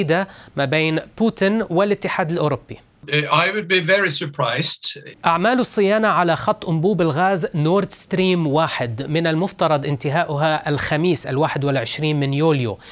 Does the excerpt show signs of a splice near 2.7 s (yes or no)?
no